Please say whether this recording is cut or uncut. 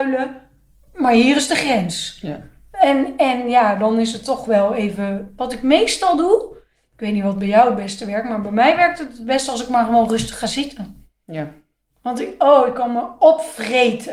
uncut